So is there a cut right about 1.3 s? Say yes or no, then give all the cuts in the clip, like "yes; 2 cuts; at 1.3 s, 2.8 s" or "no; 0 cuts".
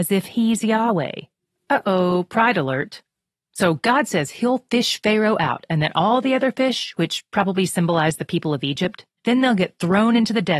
no; 1 cut; at 9.2 s